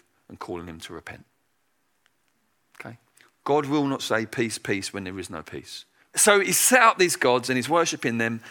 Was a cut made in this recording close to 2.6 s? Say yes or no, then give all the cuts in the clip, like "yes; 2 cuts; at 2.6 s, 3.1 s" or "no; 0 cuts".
no; 1 cut; at 6.1 s